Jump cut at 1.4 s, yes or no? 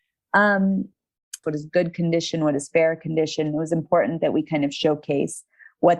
yes